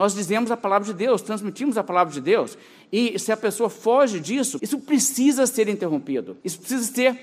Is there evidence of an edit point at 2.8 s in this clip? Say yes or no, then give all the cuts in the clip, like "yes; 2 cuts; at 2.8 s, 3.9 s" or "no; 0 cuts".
no; 1 cut; at 4.6 s